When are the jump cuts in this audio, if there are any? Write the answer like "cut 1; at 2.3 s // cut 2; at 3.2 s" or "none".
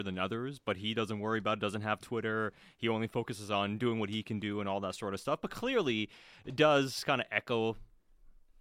none